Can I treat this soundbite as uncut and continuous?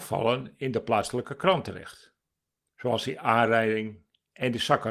no; 1 cut; at 2.6 s

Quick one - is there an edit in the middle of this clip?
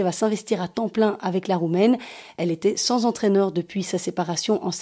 no; 0 cuts

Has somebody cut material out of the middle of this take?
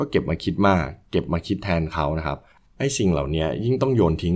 no; 0 cuts

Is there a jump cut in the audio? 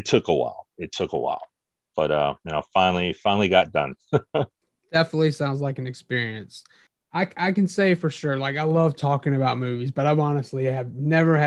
no; 0 cuts

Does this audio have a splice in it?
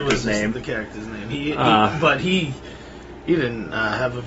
no; 0 cuts

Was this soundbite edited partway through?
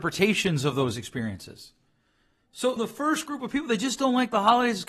yes; 1 cut; at 2.8 s

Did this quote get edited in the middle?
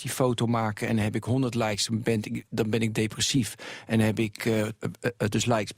yes; 1 cut; at 4.8 s

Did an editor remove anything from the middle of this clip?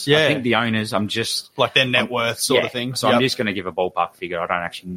no; 0 cuts

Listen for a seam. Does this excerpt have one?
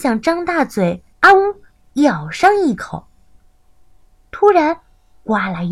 yes; 1 cut; at 1.1 s

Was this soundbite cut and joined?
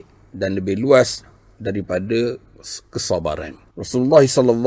yes; 1 cut; at 3.7 s

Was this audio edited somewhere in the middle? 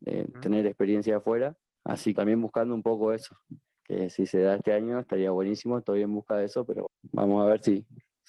yes; 2 cuts; at 2.2 s, 6.9 s

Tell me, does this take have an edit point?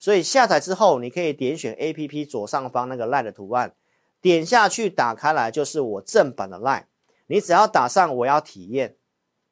no; 0 cuts

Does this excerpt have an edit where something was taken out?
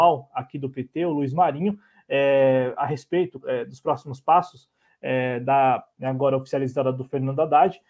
yes; 2 cuts; at 3.4 s, 6.0 s

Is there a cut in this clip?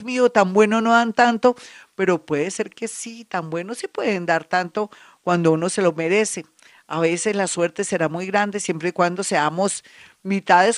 no; 0 cuts

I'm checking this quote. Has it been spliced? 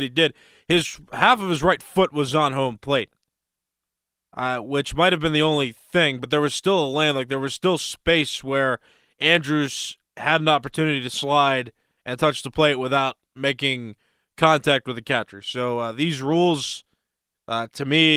no; 0 cuts

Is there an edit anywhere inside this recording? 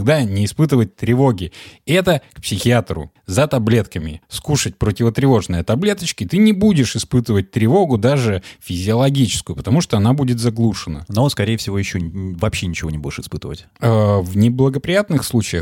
no; 0 cuts

